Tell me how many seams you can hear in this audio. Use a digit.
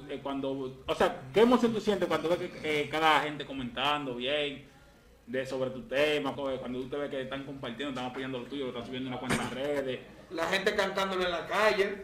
1